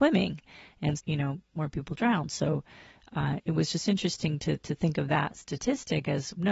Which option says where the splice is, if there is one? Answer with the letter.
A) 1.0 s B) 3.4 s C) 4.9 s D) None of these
A